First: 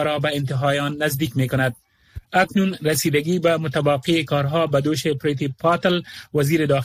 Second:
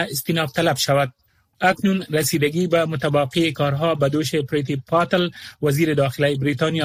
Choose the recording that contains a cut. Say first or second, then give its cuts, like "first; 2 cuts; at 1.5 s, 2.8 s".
second; 1 cut; at 1.5 s